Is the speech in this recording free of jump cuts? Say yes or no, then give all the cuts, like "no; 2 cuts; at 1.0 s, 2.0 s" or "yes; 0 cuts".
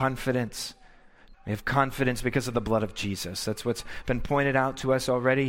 no; 1 cut; at 1.3 s